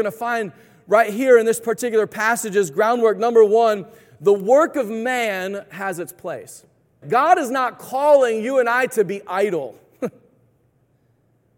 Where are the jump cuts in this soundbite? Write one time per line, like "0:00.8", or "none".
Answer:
0:07.0